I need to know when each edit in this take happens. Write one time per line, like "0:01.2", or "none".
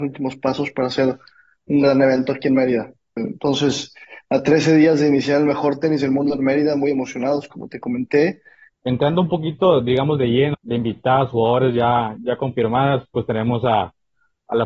0:03.2
0:08.7
0:10.5